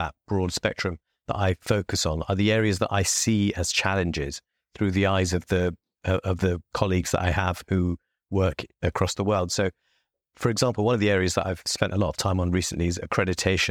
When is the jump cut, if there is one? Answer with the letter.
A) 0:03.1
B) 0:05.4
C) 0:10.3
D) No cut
D